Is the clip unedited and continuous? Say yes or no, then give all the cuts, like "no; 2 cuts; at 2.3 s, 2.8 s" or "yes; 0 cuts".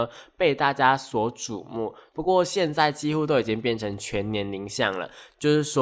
no; 1 cut; at 2.1 s